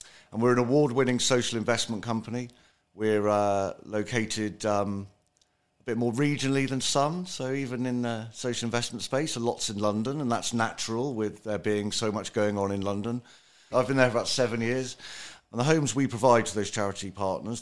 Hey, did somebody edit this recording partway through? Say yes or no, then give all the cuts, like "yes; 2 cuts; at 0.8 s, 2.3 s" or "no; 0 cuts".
yes; 2 cuts; at 13.7 s, 15.4 s